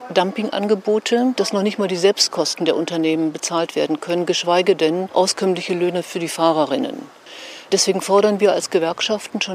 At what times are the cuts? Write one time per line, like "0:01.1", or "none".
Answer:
0:01.4